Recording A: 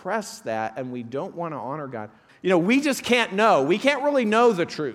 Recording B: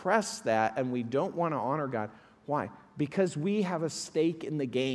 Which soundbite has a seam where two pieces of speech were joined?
A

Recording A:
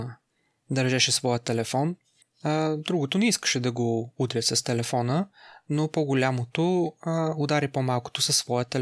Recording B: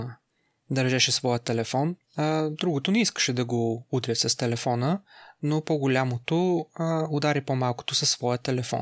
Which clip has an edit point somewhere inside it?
B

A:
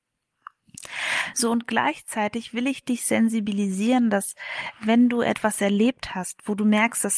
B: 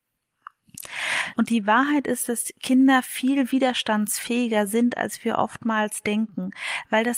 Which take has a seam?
B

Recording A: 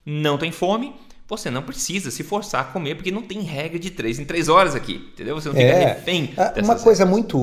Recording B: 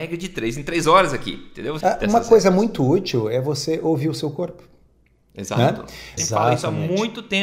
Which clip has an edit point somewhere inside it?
B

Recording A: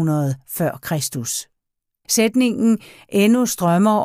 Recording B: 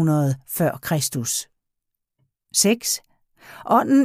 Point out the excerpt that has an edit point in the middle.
A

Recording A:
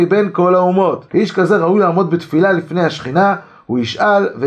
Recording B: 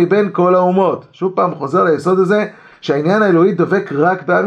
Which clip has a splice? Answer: A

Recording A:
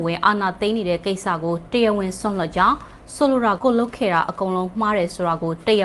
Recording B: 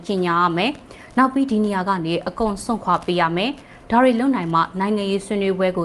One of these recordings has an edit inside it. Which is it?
A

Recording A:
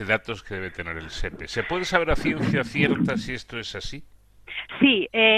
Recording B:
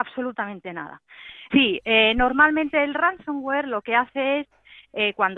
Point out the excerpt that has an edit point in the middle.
B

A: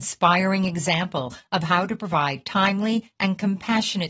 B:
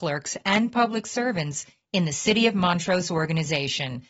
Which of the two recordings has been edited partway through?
A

